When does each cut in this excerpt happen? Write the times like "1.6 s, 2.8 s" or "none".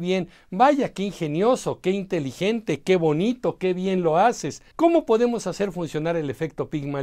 4.7 s